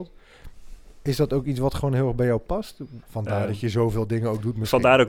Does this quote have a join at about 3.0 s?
yes; 1 cut; at 3.0 s

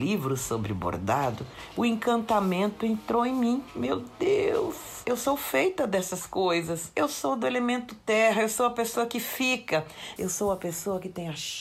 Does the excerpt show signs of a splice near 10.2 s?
yes; 1 cut; at 10.2 s

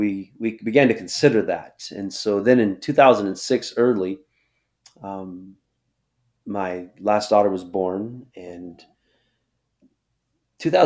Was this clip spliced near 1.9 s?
no; 0 cuts

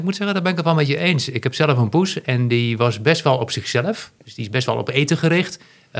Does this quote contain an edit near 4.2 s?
yes; 1 cut; at 4.2 s

